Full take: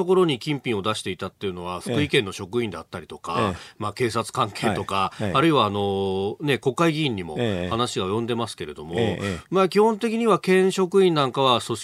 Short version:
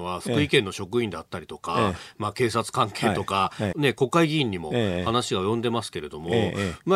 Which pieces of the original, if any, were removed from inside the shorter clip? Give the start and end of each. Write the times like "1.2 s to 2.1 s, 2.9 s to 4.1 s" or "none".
5.3 s to 6.4 s